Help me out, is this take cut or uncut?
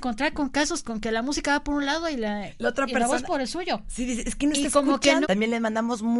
cut